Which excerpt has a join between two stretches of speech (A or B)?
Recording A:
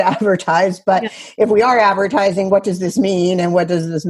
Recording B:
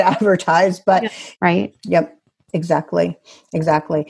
B